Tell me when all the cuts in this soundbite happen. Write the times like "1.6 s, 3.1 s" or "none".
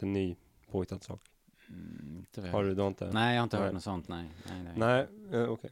none